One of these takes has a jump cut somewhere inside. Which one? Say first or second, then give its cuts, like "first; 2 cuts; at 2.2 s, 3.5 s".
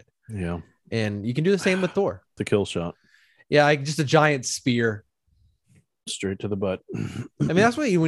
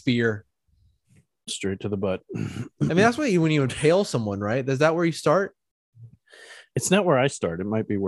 first; 1 cut; at 2.4 s